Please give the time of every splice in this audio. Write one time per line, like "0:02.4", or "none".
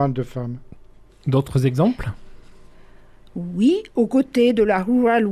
0:01.1
0:03.9